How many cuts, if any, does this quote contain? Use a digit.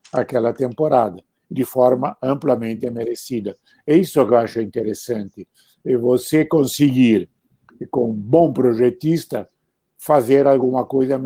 0